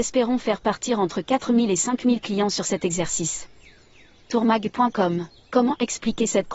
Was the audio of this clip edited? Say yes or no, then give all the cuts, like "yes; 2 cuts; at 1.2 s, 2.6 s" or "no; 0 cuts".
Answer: no; 0 cuts